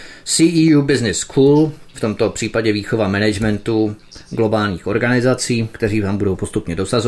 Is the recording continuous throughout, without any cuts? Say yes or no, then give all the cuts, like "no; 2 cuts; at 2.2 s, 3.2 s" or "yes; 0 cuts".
no; 1 cut; at 1.9 s